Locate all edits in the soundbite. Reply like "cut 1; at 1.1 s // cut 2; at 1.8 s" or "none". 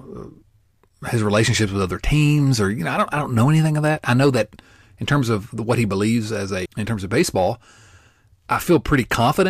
cut 1; at 6.7 s